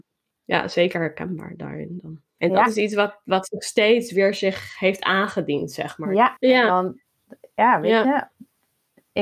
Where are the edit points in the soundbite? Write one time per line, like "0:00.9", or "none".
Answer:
0:02.4
0:06.4

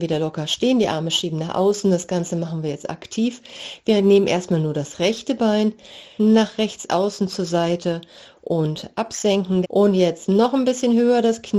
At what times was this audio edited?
0:06.2
0:09.6

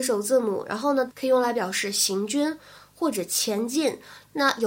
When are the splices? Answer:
0:01.1

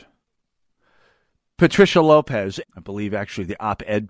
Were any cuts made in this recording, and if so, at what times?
0:02.6

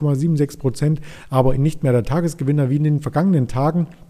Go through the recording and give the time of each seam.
0:01.6

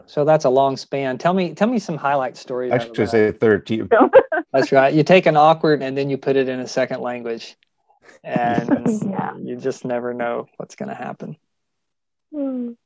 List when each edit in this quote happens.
0:03.9
0:05.8

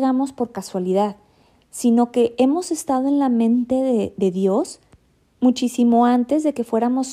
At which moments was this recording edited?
none

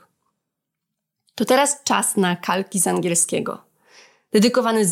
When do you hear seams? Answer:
none

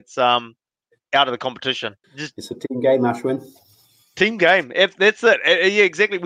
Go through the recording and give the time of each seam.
0:02.0

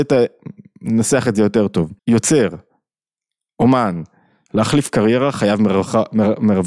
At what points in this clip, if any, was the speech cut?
0:02.0
0:04.5

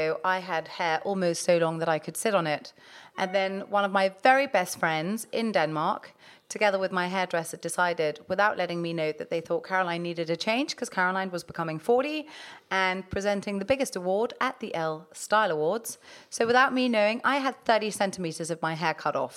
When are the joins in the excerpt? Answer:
none

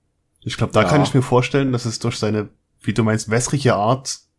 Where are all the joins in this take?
none

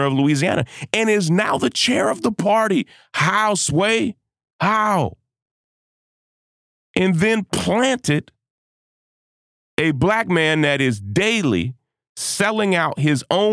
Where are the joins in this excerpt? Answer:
none

